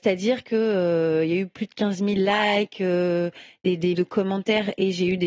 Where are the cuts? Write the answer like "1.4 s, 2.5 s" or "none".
3.9 s